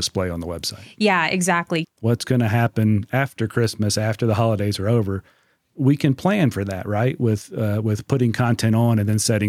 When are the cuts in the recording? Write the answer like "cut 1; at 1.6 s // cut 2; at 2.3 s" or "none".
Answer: cut 1; at 1.8 s